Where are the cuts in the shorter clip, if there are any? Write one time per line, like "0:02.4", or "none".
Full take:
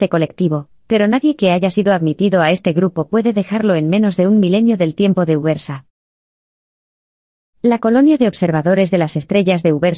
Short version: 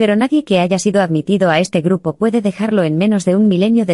none